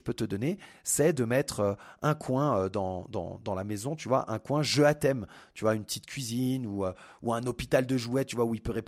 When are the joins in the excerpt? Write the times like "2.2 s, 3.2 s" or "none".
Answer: none